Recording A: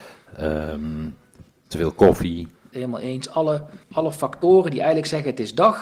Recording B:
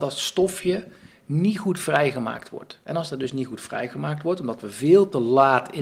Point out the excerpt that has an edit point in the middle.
A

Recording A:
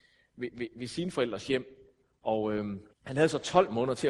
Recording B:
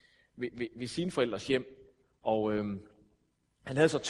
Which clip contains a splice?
A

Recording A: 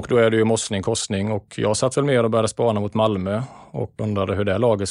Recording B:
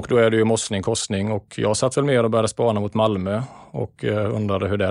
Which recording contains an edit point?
A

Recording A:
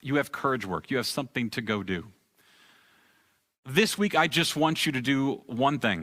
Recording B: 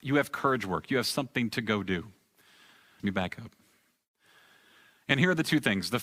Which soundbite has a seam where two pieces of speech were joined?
B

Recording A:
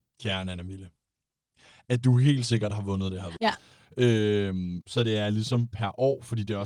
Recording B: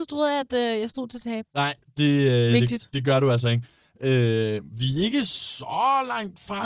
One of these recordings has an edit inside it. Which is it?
A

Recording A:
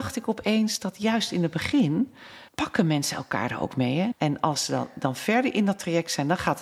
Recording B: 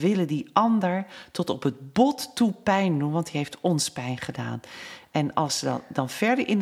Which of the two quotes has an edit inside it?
A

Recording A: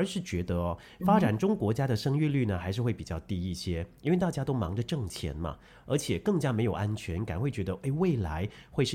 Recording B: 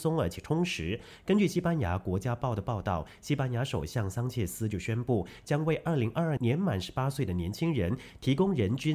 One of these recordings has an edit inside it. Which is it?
B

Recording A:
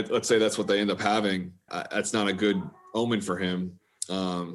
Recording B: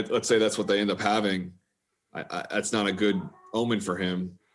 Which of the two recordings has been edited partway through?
A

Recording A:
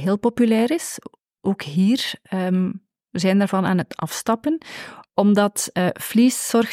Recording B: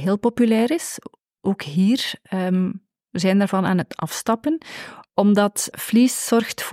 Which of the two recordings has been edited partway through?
B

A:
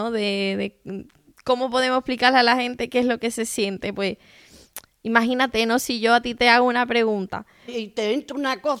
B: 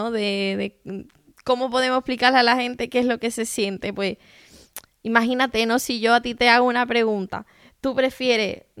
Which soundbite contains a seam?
A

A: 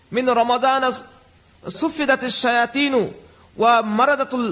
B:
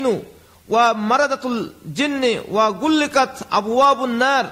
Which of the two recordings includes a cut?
A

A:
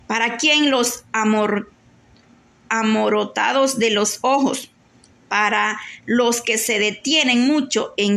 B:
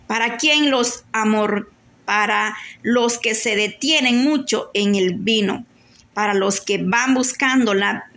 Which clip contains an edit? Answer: B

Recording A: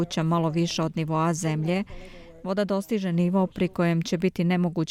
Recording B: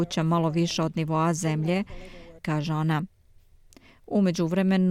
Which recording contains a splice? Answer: B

